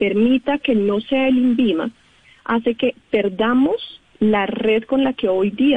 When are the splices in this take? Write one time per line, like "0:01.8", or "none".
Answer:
none

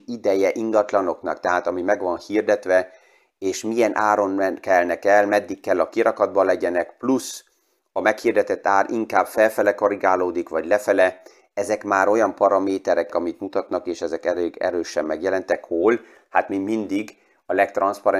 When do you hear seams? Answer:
0:13.1

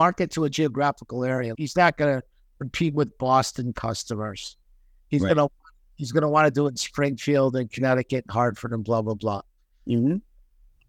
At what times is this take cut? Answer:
0:01.5

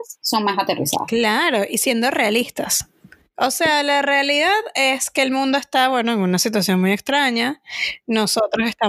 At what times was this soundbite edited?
none

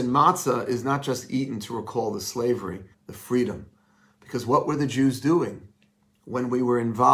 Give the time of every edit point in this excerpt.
0:02.9

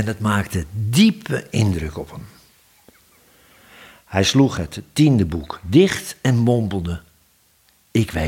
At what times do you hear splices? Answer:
none

